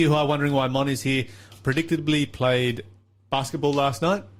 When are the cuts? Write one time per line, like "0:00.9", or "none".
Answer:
0:01.5